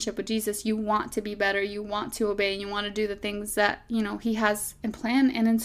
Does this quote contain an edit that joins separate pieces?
no; 0 cuts

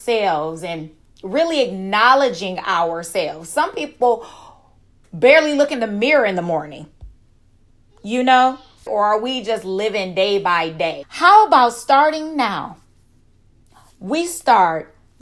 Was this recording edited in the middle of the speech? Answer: yes; 2 cuts; at 8.9 s, 11.0 s

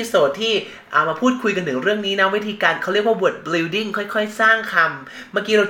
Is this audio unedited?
yes; 0 cuts

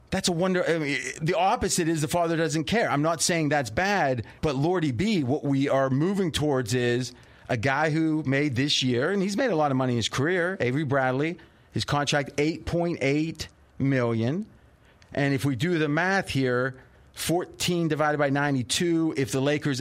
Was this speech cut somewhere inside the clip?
yes; 1 cut; at 4.4 s

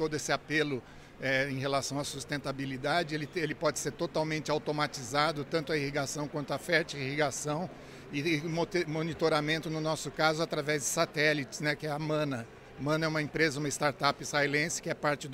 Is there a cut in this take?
no; 0 cuts

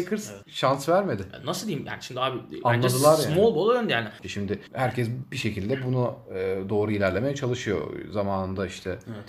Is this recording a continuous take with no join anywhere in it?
no; 1 cut; at 4.2 s

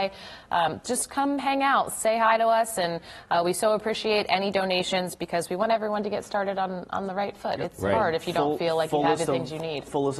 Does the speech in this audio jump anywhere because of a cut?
no; 0 cuts

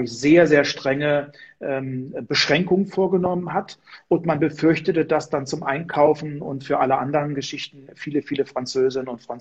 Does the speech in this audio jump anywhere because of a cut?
no; 0 cuts

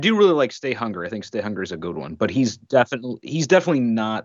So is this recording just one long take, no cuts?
yes; 0 cuts

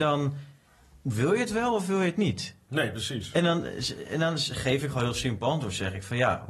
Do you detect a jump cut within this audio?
no; 0 cuts

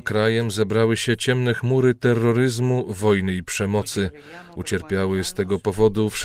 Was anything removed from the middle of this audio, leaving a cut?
no; 0 cuts

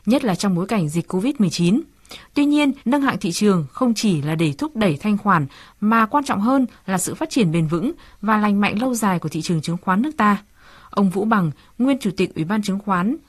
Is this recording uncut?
no; 1 cut; at 2.8 s

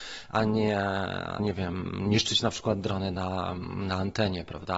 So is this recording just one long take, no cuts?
no; 1 cut; at 1.4 s

